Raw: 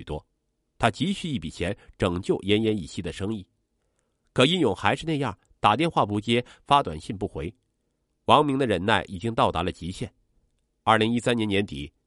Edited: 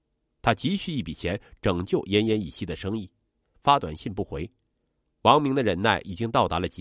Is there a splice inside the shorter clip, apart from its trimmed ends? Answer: yes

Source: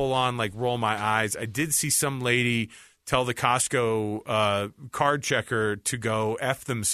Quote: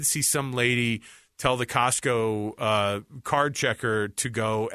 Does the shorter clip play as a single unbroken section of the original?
yes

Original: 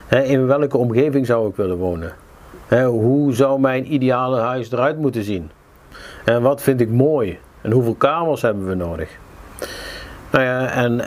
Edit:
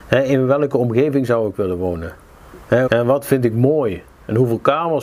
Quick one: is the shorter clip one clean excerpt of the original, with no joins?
no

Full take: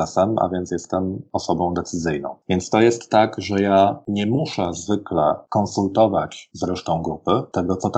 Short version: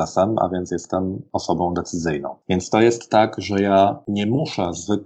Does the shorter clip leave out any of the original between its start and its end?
no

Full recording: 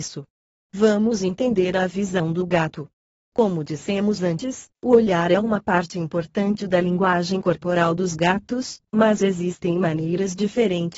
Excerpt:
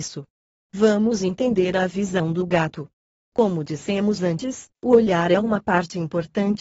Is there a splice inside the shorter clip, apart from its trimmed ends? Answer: no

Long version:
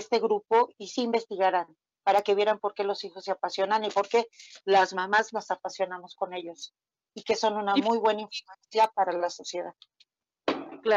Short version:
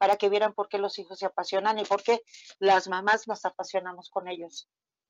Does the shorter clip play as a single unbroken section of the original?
yes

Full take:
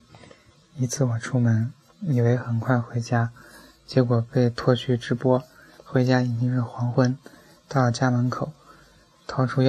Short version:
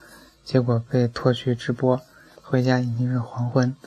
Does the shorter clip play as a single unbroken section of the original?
yes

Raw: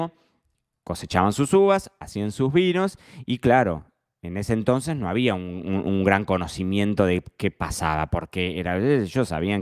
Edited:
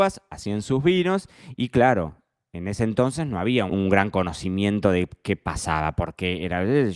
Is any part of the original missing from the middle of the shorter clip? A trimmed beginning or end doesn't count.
yes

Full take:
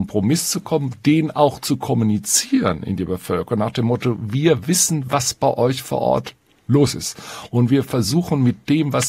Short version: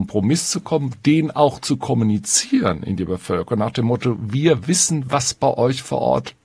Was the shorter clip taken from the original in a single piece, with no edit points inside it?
yes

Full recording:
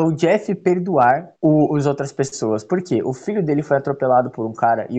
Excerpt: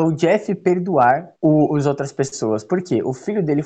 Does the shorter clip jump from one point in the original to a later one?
no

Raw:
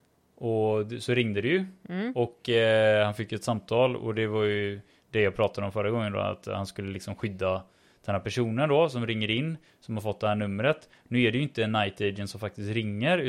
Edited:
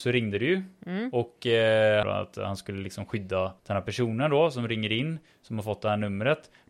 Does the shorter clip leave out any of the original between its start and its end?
yes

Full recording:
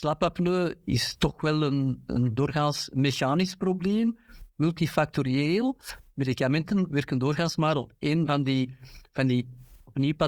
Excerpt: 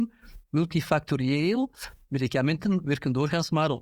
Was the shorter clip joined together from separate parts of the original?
no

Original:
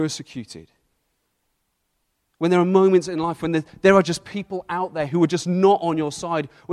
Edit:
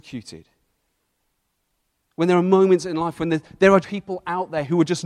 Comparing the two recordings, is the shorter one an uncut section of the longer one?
no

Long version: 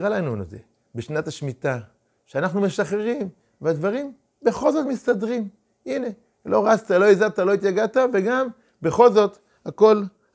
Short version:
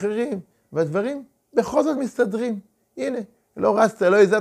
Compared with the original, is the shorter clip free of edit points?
yes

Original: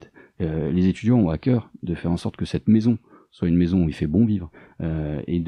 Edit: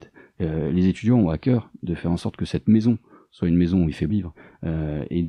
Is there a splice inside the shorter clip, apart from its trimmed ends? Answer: yes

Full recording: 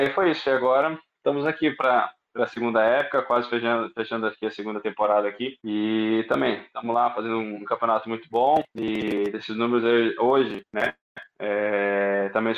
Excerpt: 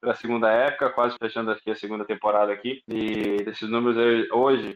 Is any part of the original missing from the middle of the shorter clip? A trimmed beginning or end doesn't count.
yes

